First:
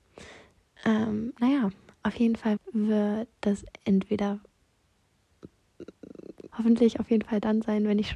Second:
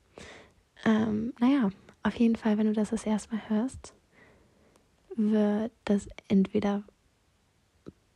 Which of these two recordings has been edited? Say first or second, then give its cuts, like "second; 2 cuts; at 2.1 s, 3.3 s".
first; 2 cuts; at 2.6 s, 6.5 s